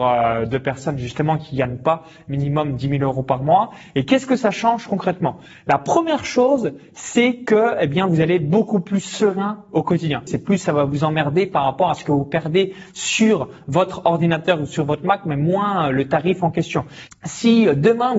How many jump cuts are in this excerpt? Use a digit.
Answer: 2